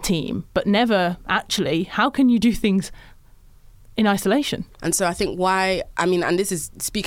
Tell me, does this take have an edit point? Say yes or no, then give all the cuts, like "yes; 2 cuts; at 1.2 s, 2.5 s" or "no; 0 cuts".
yes; 1 cut; at 4.8 s